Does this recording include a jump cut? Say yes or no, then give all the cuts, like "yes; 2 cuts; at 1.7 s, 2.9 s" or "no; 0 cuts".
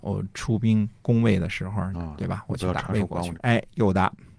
yes; 2 cuts; at 1.9 s, 3.3 s